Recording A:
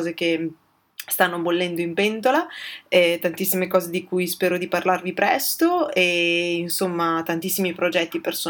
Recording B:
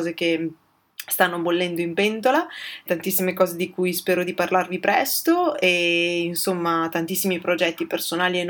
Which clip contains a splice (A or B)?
B